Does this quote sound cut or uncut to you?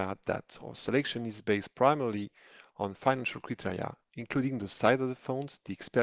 uncut